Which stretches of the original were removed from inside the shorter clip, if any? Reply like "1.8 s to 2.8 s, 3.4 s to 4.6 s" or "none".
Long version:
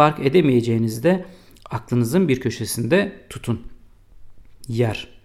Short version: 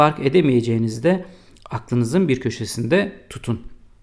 none